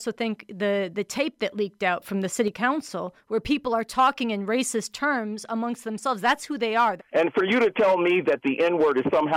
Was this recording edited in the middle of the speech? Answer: yes; 1 cut; at 7.0 s

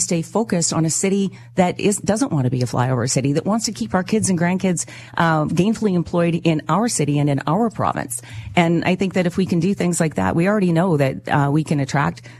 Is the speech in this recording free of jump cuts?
yes; 0 cuts

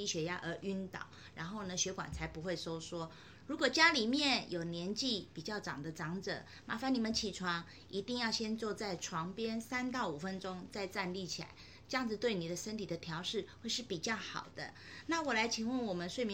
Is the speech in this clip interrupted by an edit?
no; 0 cuts

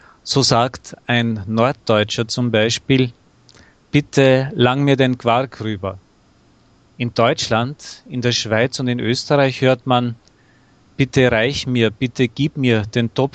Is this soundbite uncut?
yes; 0 cuts

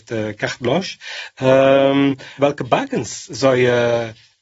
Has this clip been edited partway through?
yes; 1 cut; at 2.4 s

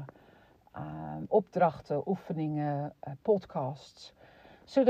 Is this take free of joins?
no; 1 cut; at 3.2 s

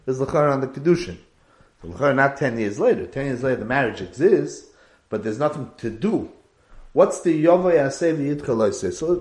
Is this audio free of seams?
yes; 0 cuts

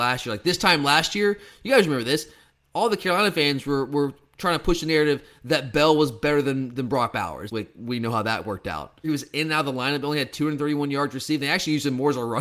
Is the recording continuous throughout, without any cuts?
no; 2 cuts; at 7.5 s, 9.0 s

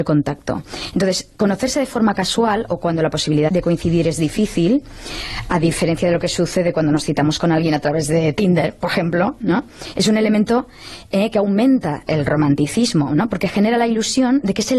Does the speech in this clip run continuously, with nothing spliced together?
no; 1 cut; at 3.5 s

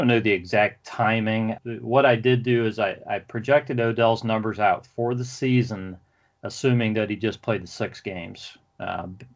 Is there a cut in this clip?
yes; 1 cut; at 1.6 s

